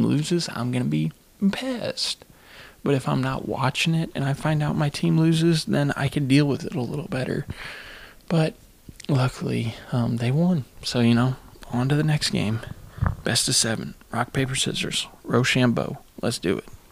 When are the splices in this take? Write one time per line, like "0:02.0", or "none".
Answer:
none